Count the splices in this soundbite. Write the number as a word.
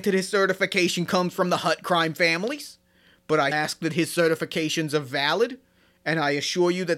one